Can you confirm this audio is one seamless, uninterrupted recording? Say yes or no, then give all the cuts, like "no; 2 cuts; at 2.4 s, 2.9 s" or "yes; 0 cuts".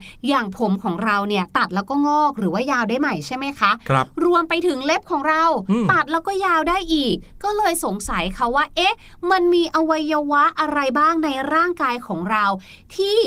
yes; 0 cuts